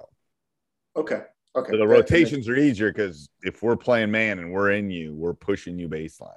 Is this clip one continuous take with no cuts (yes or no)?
yes